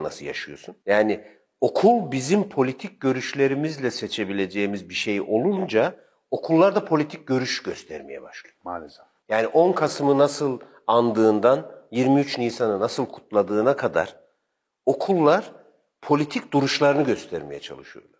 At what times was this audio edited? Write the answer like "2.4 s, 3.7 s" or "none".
none

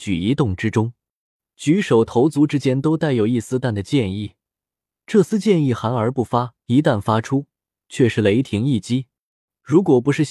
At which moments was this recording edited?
3.6 s, 6.6 s

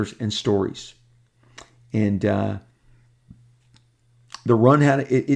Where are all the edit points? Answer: none

